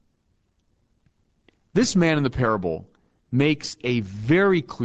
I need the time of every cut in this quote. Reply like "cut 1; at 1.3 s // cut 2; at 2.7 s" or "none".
none